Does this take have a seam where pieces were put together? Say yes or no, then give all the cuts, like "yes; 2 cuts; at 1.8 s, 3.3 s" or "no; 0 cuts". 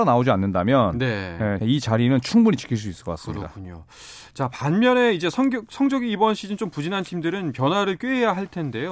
yes; 1 cut; at 1.6 s